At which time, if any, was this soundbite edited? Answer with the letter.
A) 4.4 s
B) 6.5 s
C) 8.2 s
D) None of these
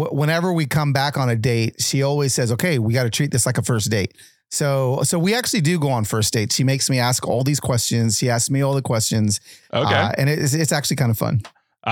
D